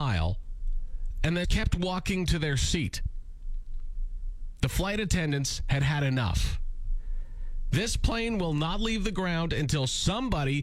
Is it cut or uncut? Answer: cut